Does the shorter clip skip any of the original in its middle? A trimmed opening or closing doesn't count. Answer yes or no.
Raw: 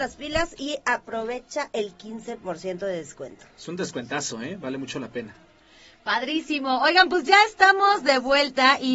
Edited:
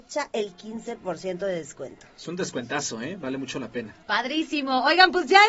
yes